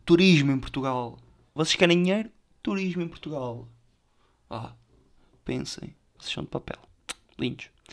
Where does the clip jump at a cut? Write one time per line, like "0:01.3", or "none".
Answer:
0:01.6
0:06.2